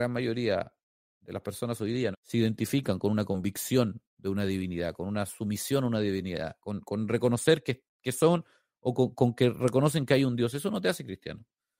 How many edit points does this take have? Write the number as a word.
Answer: two